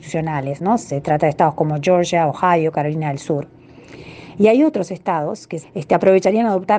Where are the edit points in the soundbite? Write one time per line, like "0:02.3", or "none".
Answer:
0:05.6

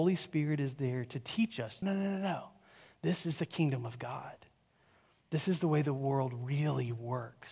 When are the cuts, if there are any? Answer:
0:01.8

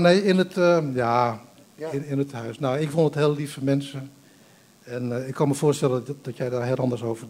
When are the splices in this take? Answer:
none

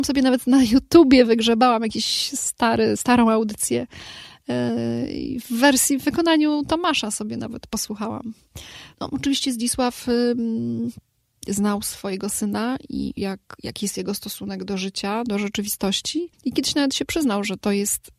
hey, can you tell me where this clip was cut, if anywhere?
0:08.9
0:13.2
0:16.3

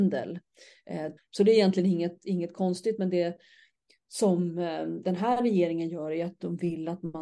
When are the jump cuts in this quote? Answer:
0:01.2

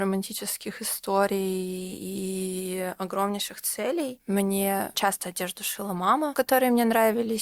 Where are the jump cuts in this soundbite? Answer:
0:04.9
0:06.3

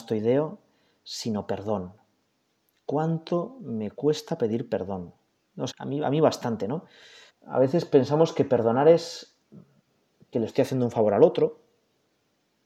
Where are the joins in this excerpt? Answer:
0:05.7
0:07.3

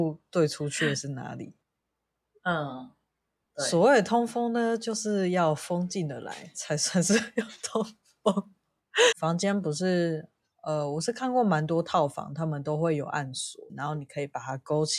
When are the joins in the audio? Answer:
0:09.1
0:13.7

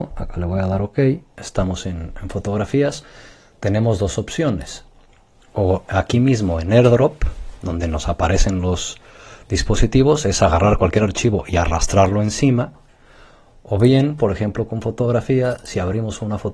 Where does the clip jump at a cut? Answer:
none

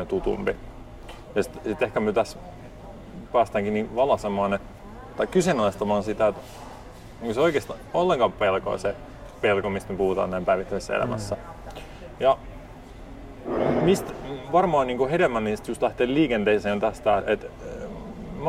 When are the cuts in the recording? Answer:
0:17.2

